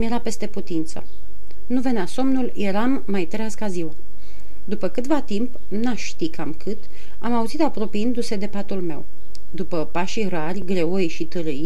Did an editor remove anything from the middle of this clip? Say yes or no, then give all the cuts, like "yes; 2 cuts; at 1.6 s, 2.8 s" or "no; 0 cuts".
no; 0 cuts